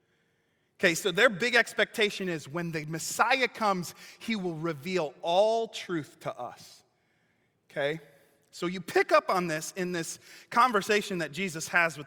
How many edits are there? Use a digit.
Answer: 0